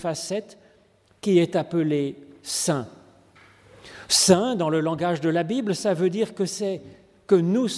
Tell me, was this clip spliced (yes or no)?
no